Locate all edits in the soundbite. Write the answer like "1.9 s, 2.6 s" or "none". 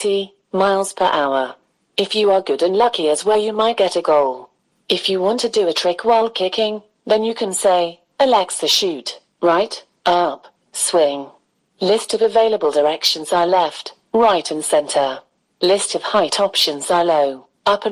10.6 s